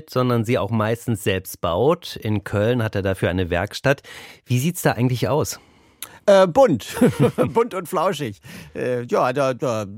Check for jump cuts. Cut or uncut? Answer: uncut